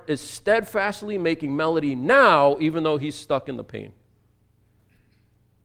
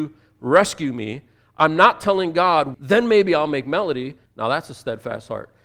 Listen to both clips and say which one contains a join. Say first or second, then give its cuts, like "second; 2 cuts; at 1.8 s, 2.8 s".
second; 2 cuts; at 2.7 s, 4.3 s